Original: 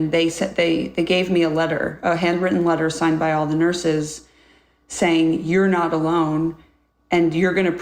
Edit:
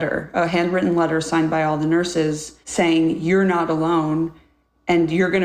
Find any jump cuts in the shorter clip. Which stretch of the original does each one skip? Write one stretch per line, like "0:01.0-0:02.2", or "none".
0:04.3-0:04.8